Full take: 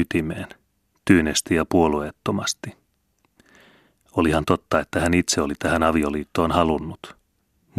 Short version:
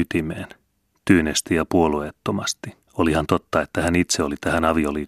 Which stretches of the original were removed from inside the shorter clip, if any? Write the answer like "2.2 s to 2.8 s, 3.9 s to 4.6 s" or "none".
2.8 s to 4.0 s